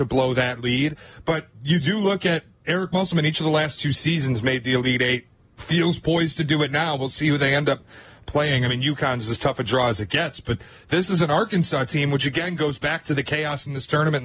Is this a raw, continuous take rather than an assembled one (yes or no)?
yes